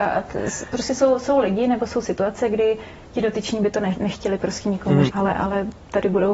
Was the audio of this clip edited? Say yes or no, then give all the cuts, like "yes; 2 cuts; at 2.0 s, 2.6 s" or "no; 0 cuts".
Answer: yes; 1 cut; at 5.1 s